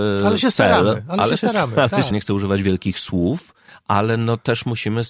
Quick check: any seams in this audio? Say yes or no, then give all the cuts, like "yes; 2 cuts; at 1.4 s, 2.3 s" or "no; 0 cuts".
yes; 1 cut; at 2.1 s